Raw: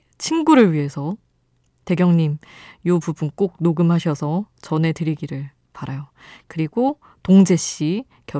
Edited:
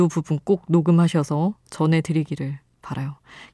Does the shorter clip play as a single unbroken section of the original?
yes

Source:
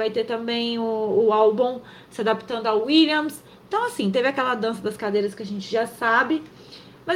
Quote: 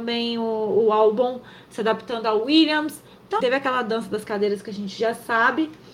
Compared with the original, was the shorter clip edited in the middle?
yes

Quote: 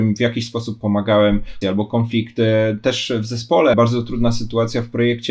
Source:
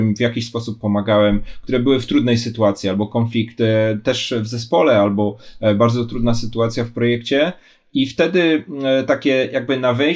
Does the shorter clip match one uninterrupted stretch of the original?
no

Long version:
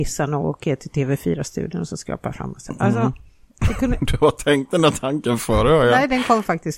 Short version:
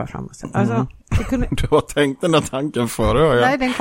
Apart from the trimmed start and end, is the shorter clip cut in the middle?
yes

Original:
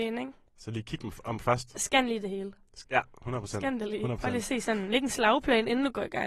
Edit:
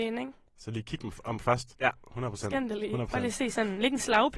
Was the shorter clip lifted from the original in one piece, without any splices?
no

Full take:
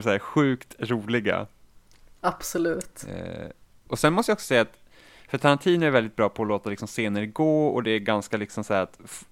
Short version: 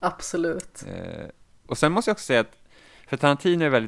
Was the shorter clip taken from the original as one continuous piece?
yes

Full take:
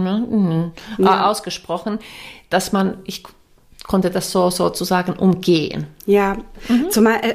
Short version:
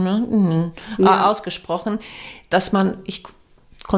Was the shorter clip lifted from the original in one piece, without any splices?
yes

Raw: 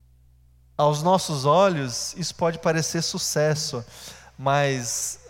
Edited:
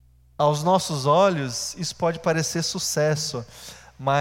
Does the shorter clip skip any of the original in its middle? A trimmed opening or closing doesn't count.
no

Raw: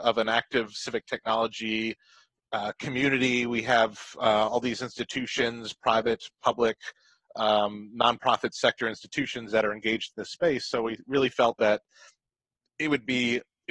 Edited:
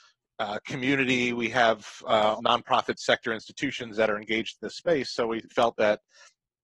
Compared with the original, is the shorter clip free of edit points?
no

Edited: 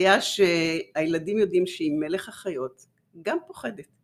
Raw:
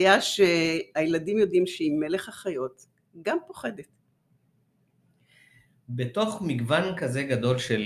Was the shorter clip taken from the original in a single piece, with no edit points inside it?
yes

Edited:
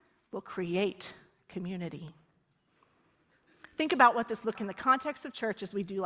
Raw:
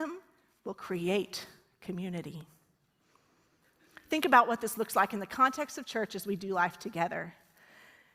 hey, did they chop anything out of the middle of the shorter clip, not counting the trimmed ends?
yes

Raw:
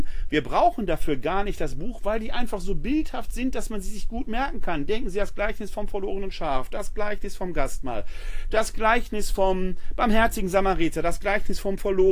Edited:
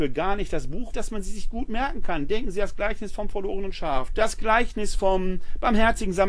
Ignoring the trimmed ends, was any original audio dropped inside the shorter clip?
yes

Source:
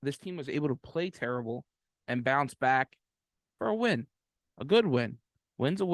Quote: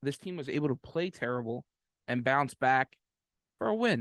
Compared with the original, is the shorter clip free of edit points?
yes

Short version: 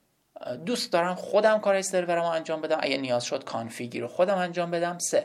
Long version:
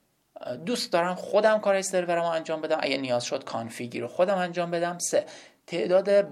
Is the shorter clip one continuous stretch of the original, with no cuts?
yes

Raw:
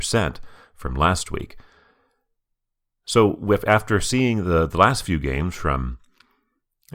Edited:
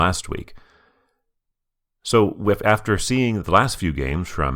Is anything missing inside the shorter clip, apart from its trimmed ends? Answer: yes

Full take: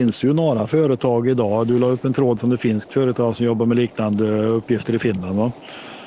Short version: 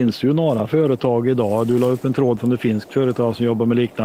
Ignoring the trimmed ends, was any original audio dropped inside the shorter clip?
no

